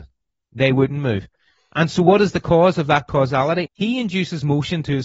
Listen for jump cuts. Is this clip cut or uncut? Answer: cut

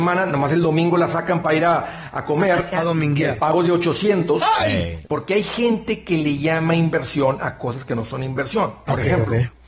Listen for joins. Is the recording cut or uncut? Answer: cut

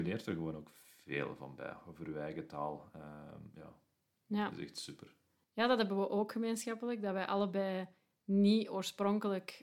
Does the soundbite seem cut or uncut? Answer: uncut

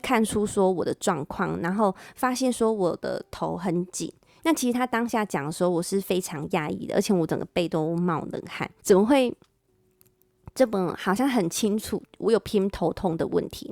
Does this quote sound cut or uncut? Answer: cut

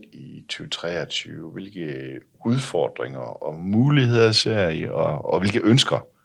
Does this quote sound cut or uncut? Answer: uncut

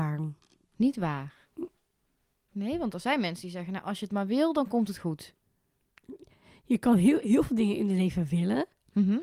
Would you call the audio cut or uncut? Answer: uncut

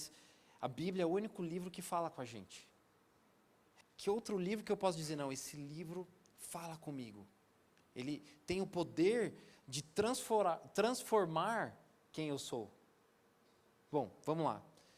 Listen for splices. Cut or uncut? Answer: cut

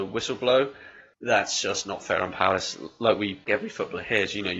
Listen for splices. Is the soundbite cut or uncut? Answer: cut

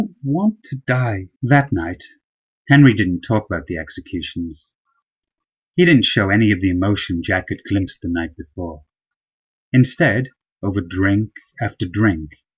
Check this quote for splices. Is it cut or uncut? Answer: cut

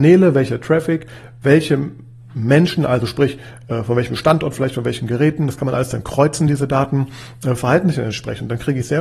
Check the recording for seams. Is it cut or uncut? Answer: uncut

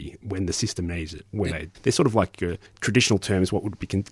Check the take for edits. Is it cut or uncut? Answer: cut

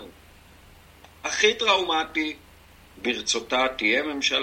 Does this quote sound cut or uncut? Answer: cut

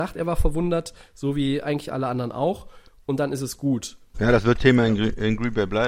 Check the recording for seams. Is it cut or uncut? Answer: cut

